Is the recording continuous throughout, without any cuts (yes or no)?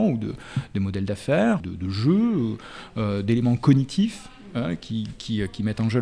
no